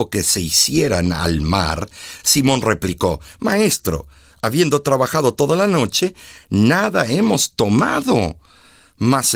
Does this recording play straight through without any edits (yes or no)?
yes